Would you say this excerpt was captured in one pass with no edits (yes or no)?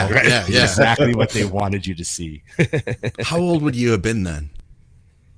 yes